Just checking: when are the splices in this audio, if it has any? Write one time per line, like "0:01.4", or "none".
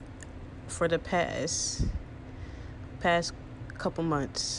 none